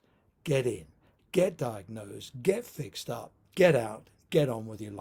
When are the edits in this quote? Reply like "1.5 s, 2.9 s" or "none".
none